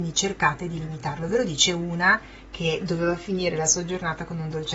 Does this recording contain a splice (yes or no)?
no